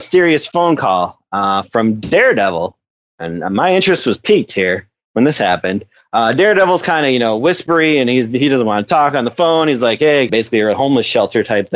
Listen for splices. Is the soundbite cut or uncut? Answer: cut